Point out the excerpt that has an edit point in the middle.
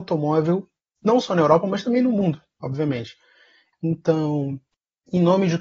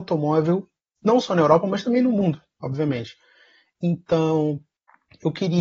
first; 1 cut; at 3.7 s

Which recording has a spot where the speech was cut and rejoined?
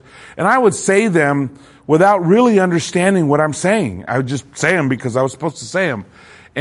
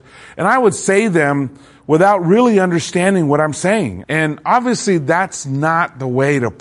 second; 1 cut; at 4.0 s

